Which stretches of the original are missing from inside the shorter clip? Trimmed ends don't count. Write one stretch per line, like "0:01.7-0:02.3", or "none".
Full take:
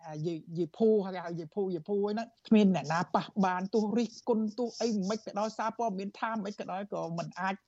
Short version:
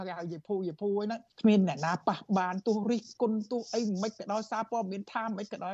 none